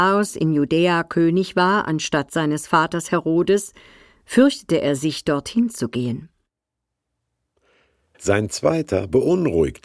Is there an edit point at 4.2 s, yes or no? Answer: no